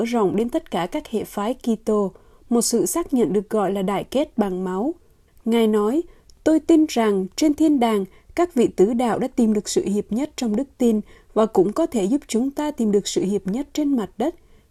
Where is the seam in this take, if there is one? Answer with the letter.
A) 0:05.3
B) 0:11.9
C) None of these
A